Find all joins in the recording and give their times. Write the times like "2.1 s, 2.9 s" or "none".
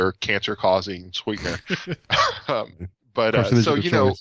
none